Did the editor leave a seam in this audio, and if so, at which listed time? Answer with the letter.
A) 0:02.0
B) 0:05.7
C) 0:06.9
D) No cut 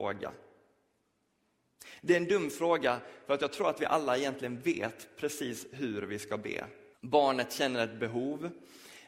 C